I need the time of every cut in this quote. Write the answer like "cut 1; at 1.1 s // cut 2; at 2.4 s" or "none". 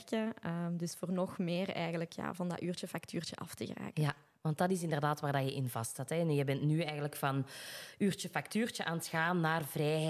none